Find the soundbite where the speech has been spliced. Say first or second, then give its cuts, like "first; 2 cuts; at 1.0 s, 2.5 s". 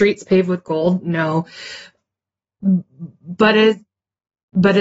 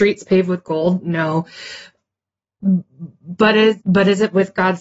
second; 1 cut; at 3.8 s